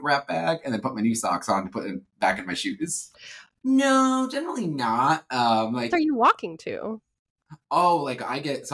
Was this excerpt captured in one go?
no; 2 cuts; at 3.6 s, 5.9 s

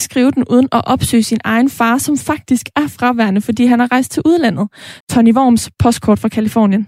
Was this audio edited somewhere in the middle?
yes; 1 cut; at 5.0 s

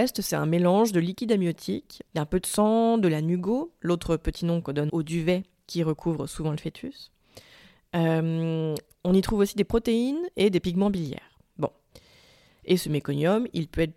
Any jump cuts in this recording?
yes; 2 cuts; at 2.1 s, 4.9 s

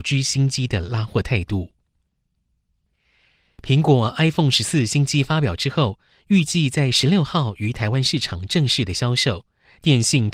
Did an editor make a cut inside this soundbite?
no; 0 cuts

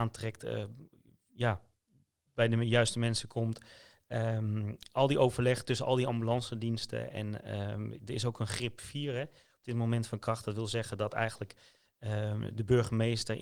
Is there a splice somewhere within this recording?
no; 0 cuts

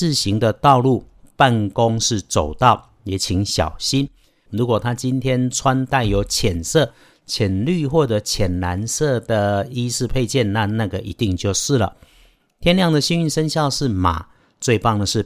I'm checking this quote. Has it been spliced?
yes; 1 cut; at 4.5 s

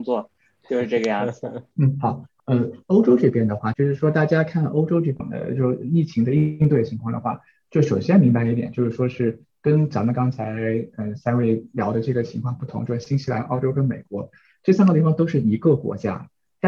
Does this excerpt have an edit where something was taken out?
yes; 2 cuts; at 1.7 s, 3.7 s

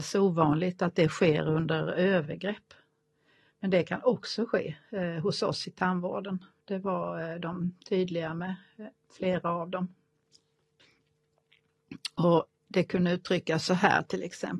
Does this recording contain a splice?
no; 0 cuts

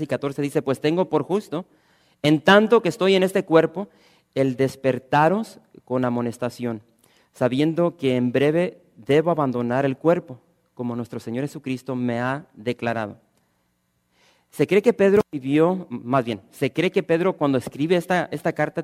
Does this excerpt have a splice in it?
no; 0 cuts

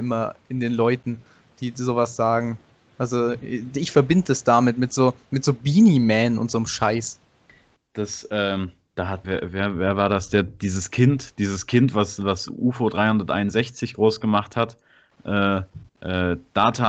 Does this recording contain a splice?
yes; 2 cuts; at 9.2 s, 15.9 s

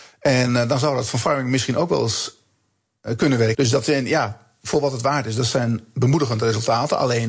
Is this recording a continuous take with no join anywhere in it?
no; 1 cut; at 3.5 s

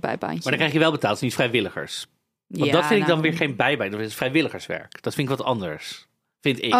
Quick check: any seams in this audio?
no; 0 cuts

